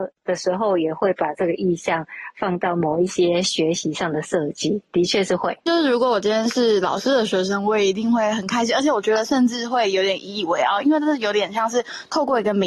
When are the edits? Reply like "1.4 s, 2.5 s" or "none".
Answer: 5.7 s